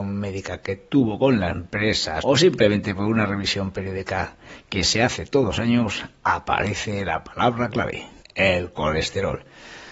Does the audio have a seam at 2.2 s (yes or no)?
yes